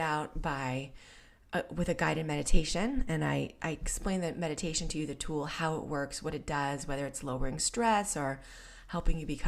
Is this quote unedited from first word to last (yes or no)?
yes